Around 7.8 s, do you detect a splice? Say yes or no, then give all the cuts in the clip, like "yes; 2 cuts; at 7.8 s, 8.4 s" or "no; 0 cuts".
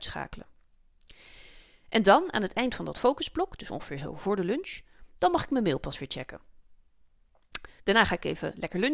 yes; 1 cut; at 7.8 s